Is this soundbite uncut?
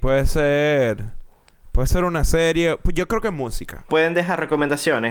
no; 1 cut; at 3.9 s

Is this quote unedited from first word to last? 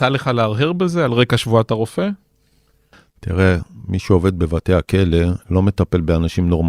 yes; 0 cuts

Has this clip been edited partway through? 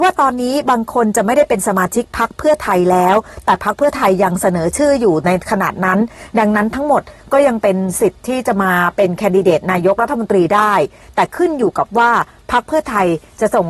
no; 0 cuts

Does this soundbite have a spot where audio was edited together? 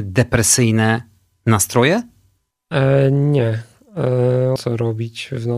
yes; 1 cut; at 4.6 s

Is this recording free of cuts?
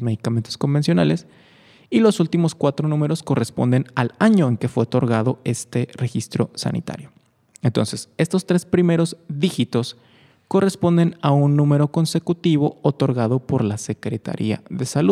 no; 1 cut; at 7.5 s

